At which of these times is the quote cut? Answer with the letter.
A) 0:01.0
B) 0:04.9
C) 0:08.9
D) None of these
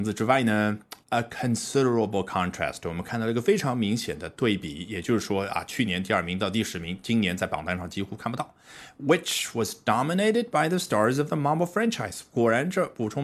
A